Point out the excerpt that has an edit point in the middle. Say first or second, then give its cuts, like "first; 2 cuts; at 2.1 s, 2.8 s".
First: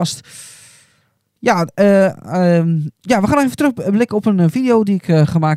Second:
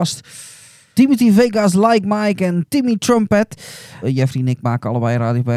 second; 2 cuts; at 1.0 s, 4.0 s